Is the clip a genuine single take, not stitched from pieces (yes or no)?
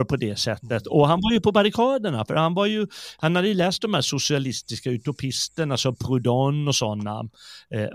yes